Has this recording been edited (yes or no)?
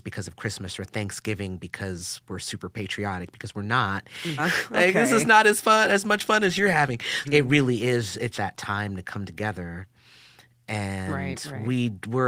yes